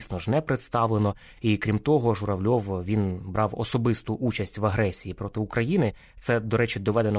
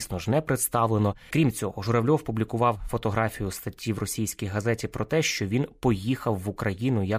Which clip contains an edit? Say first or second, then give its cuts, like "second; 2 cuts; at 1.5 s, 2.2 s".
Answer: second; 1 cut; at 1.3 s